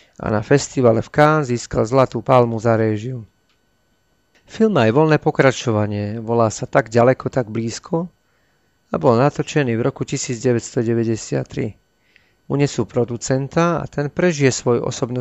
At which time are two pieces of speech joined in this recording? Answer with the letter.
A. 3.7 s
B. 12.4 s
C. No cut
B